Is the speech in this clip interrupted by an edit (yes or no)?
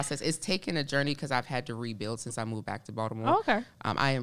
no